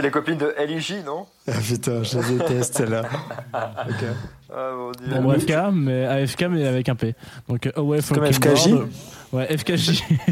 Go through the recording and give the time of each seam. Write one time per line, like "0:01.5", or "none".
0:05.5